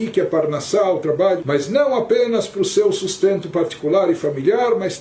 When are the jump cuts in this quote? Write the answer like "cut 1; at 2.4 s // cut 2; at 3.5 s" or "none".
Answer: cut 1; at 1.4 s